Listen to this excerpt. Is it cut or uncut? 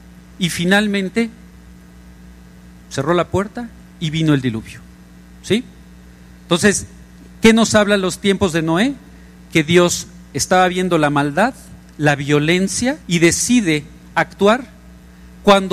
cut